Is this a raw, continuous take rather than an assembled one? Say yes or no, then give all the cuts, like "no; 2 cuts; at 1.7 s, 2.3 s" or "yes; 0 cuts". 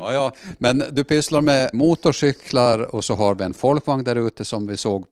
no; 1 cut; at 1.7 s